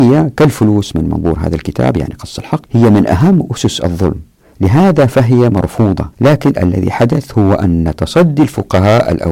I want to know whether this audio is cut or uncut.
cut